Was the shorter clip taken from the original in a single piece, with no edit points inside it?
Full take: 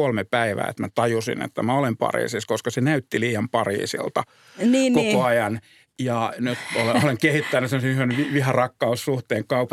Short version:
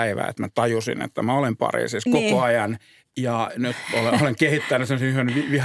no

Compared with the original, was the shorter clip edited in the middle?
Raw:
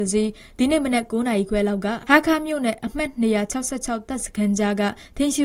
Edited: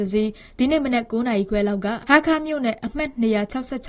no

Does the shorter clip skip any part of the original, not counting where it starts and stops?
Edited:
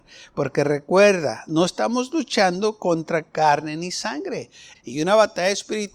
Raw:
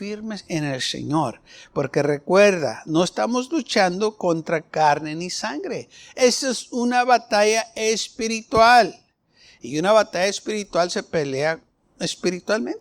yes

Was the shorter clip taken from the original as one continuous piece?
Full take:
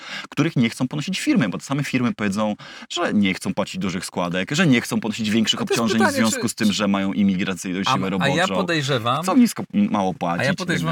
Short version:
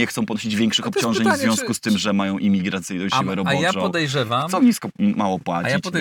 yes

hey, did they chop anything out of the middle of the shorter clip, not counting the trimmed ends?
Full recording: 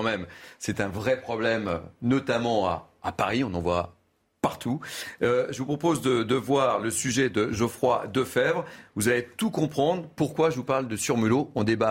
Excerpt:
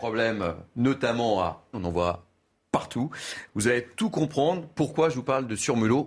yes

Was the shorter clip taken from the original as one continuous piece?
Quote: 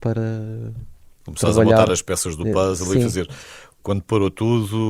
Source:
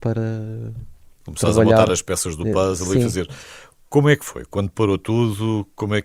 no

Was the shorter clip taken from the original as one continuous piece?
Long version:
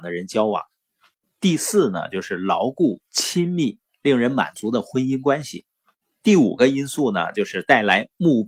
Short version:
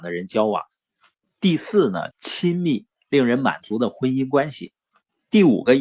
no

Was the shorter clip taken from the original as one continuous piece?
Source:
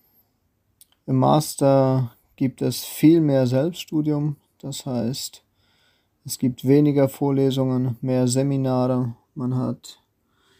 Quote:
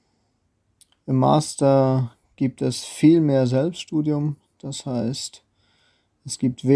yes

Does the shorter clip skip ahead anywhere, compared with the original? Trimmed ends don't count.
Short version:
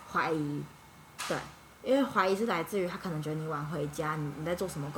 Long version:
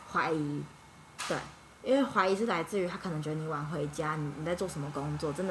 no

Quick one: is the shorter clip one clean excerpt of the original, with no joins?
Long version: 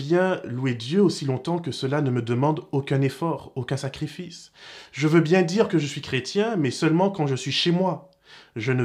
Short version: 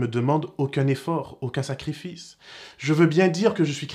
yes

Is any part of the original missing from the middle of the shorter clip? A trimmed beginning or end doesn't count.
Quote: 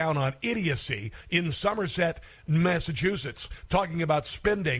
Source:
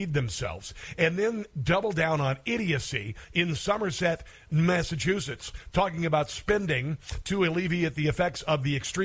no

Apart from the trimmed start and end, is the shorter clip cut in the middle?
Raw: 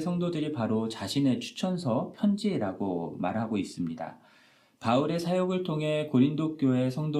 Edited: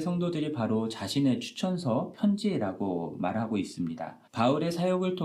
yes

